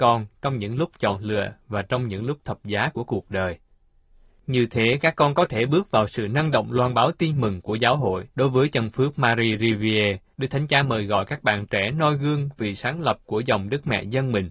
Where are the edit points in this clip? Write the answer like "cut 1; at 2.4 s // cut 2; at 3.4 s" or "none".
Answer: cut 1; at 8.3 s // cut 2; at 10.3 s

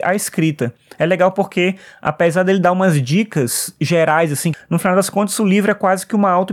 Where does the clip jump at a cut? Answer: cut 1; at 4.5 s

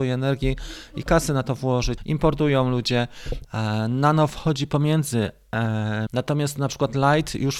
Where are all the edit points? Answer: cut 1; at 2.0 s // cut 2; at 3.4 s // cut 3; at 6.1 s

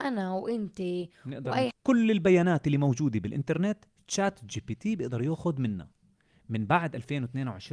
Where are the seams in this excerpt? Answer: cut 1; at 1.7 s

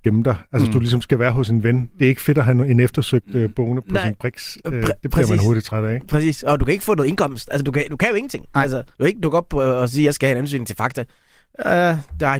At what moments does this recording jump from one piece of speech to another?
none

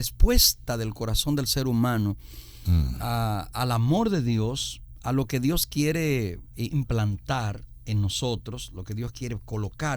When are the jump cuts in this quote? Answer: none

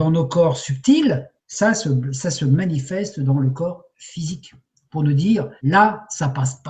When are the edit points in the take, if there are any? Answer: cut 1; at 1.4 s // cut 2; at 5.6 s

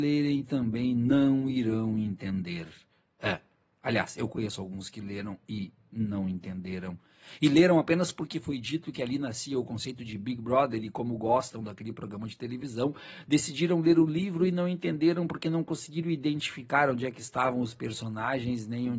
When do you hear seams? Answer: none

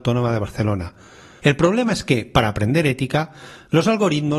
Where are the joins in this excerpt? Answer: cut 1; at 1.4 s

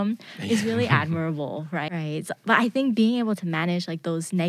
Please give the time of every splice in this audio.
cut 1; at 1.9 s

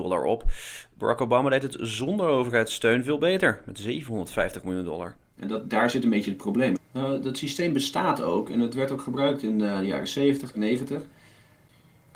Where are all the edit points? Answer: cut 1; at 6.7 s // cut 2; at 10.5 s

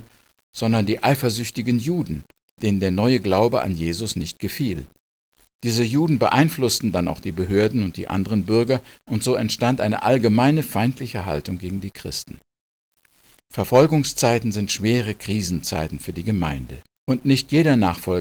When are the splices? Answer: cut 1; at 16.9 s

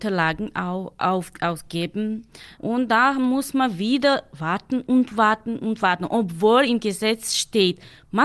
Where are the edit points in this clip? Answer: cut 1; at 2.6 s

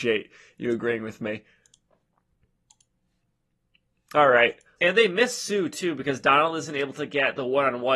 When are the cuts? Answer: cut 1; at 4.8 s

